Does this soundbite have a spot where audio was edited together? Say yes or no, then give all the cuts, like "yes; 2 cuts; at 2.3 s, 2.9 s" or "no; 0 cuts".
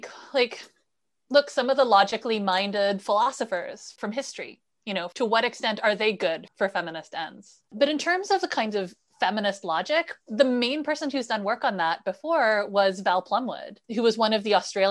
yes; 2 cuts; at 7.7 s, 10.2 s